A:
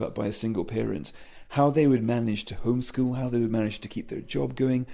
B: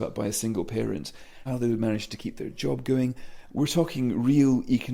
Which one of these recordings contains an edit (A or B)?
B